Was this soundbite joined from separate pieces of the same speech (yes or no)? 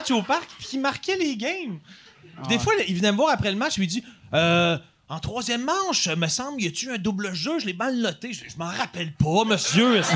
no